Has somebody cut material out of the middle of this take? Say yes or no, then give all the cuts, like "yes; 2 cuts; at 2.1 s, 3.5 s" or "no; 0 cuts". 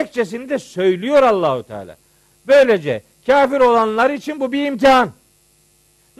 yes; 1 cut; at 2.3 s